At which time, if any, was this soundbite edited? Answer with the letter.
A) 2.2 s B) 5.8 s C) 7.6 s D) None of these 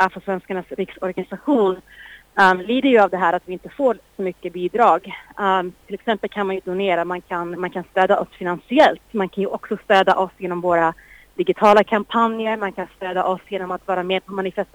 C